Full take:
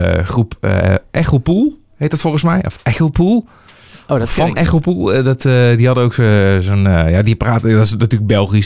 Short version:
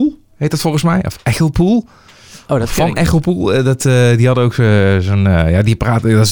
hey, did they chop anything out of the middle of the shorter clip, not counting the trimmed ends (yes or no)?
no